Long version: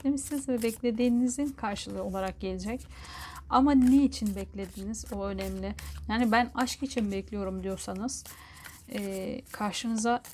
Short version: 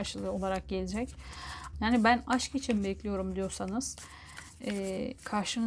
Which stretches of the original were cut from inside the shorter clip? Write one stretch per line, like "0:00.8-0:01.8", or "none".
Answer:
0:03.4-0:06.0